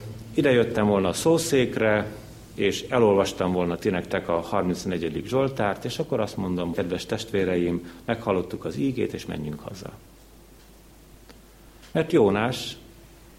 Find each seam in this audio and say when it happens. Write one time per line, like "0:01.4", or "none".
0:06.7
0:09.1